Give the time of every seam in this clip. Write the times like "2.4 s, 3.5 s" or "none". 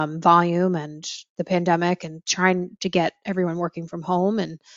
none